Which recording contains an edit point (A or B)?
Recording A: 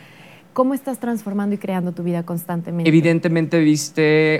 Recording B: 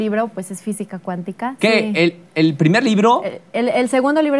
B